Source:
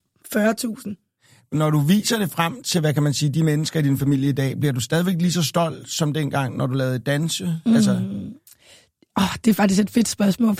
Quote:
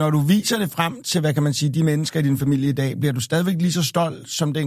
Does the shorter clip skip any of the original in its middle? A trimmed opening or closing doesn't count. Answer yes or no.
no